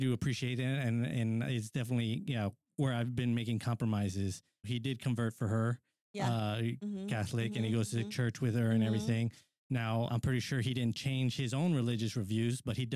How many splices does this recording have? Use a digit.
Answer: 2